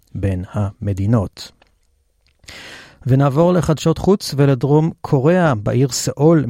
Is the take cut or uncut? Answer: uncut